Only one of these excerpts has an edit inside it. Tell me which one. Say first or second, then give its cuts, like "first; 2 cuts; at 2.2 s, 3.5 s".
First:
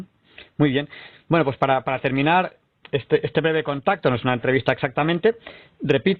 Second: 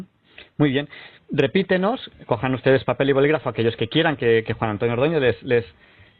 second; 1 cut; at 1.2 s